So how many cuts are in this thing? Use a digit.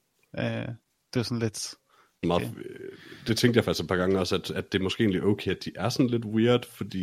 1